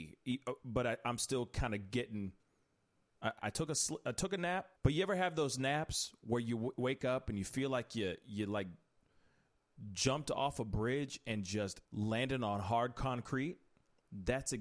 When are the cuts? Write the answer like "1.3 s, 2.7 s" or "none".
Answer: 3.4 s, 4.8 s, 11.8 s